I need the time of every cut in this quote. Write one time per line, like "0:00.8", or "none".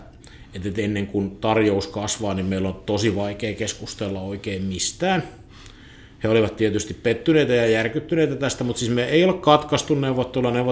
none

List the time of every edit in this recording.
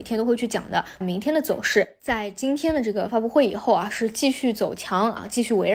0:01.0

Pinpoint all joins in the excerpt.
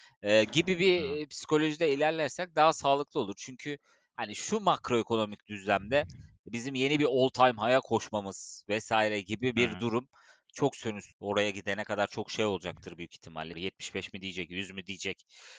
0:11.1
0:13.5

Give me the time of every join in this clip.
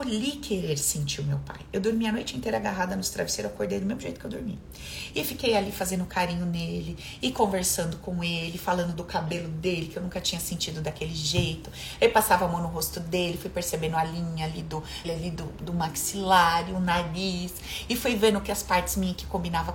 0:15.0

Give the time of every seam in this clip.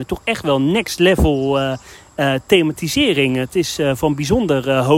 none

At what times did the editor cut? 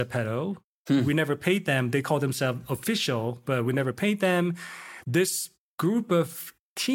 0:05.0

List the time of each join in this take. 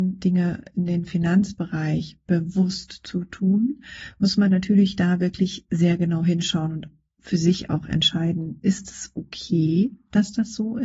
none

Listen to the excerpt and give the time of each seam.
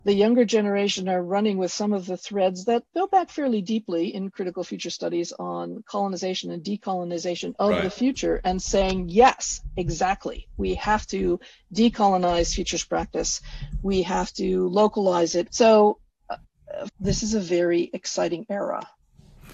0:15.5
0:16.9

